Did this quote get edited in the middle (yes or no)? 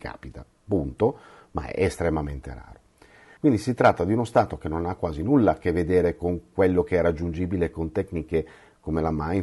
yes